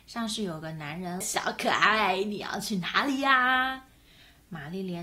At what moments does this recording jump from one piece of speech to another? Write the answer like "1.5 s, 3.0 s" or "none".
1.2 s